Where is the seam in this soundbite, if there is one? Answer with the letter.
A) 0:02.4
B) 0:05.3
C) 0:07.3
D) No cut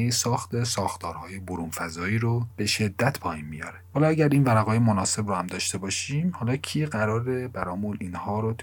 D